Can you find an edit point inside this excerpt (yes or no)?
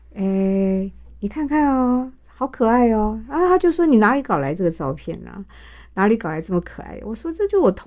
no